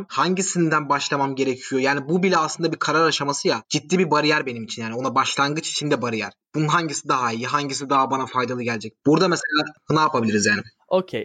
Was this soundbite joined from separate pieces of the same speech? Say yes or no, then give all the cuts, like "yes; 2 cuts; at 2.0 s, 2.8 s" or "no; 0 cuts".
yes; 1 cut; at 9.0 s